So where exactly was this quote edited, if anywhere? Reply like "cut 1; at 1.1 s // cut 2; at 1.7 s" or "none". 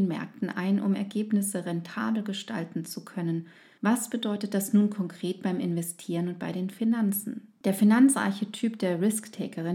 cut 1; at 3.8 s // cut 2; at 7.6 s